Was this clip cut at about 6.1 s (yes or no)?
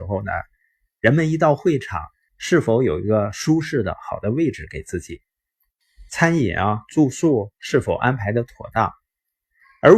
no